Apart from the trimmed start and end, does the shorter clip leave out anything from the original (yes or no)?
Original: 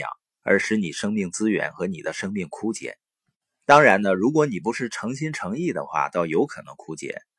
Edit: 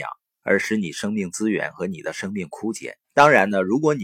yes